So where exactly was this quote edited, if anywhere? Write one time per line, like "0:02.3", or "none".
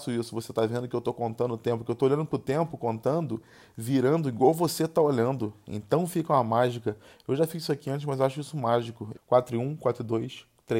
0:09.1